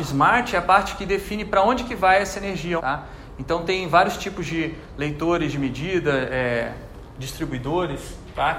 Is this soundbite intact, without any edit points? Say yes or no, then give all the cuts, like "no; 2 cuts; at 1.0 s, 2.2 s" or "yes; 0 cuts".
no; 1 cut; at 2.8 s